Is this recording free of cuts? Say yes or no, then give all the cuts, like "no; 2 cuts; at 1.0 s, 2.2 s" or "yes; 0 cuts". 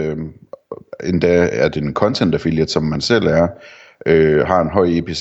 yes; 0 cuts